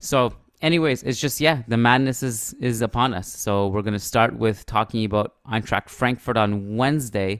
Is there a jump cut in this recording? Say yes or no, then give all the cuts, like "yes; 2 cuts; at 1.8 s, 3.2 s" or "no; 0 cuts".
no; 0 cuts